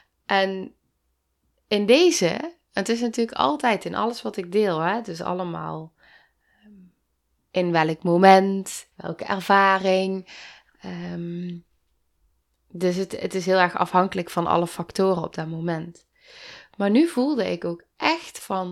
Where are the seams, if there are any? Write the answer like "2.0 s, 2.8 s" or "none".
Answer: 8.9 s